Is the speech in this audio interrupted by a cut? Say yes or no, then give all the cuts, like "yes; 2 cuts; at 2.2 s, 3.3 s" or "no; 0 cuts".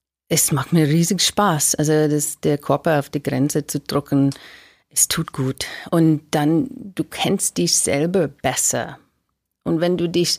no; 0 cuts